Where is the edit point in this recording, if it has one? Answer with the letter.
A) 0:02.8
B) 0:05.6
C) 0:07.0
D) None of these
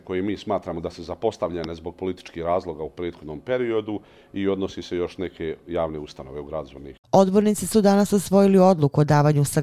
C